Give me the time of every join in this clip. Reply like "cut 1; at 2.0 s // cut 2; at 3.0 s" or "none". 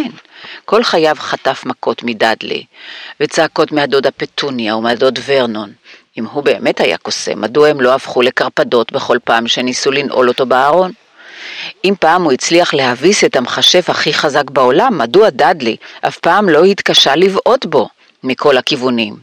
none